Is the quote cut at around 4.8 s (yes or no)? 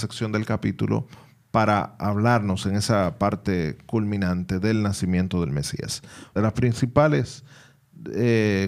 no